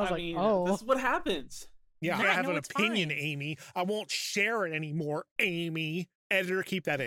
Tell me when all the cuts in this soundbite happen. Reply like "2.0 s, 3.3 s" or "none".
2.2 s

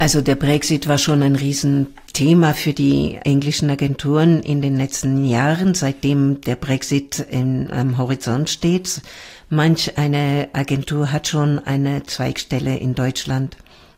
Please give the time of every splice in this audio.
none

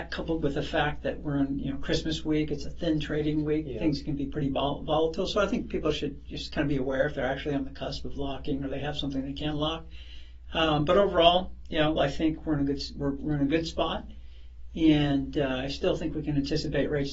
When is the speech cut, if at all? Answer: 12.0 s

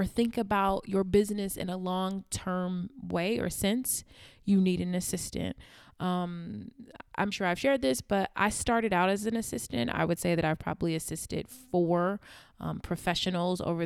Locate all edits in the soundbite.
7.3 s

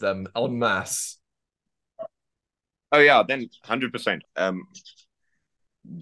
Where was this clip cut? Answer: 4.2 s

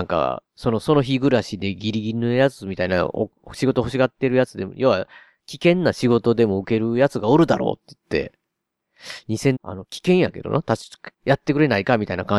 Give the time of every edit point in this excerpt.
9.6 s, 11.1 s

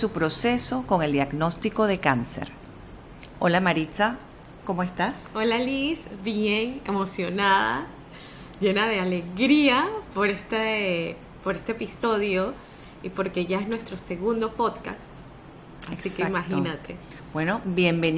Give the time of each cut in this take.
none

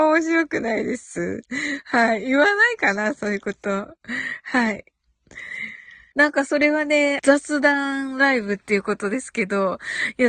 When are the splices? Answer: 6.1 s, 7.2 s

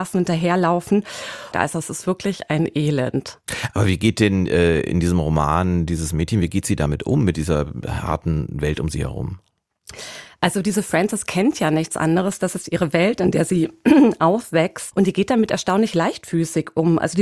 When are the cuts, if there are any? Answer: 1.5 s, 14.9 s

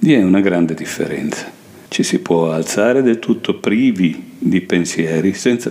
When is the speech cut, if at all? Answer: 1.9 s

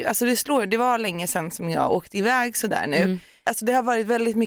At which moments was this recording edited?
3.4 s

